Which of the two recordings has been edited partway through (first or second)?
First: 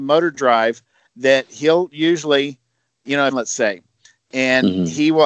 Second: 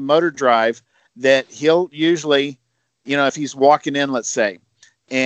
first